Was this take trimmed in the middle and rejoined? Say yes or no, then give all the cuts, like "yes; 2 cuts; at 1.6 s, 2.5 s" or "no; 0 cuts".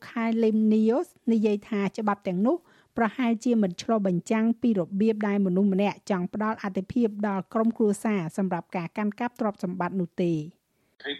no; 0 cuts